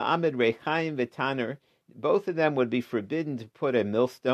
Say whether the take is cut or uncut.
uncut